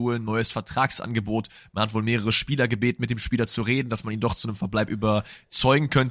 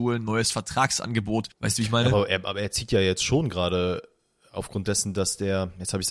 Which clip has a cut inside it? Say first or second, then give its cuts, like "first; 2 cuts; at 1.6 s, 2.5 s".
second; 1 cut; at 1.5 s